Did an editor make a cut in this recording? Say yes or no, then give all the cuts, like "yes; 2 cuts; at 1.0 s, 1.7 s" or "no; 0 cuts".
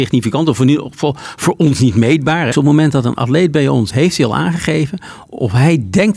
yes; 2 cuts; at 2.5 s, 3.9 s